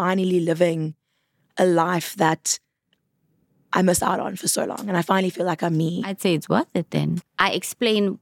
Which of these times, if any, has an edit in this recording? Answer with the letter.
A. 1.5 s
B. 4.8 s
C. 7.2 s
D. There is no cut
C